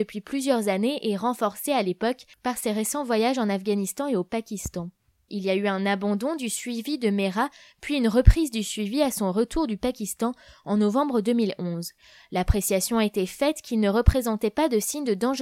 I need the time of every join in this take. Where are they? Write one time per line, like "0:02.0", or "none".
0:05.3